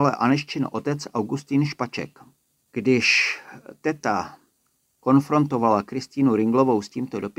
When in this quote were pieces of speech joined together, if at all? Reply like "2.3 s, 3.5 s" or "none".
2.6 s

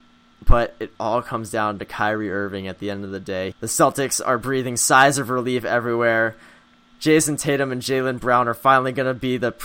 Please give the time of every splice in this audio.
3.5 s

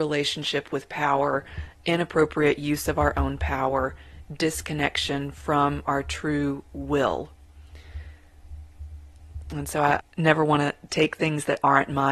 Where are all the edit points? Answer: 10.0 s

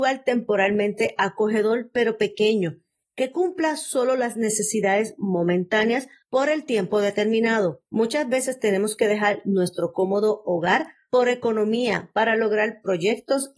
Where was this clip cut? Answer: none

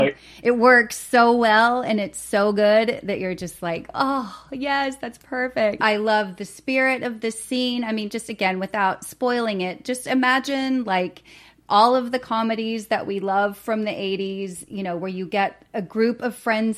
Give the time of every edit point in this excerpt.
5.8 s

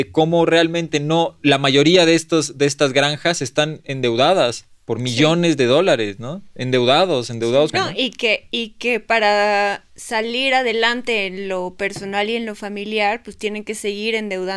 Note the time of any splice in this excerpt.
7.7 s, 9.9 s

